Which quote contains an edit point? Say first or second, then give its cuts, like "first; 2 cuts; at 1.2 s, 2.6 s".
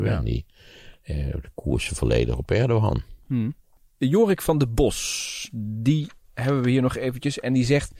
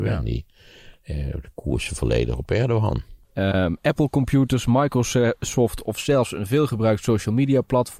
second; 1 cut; at 3.2 s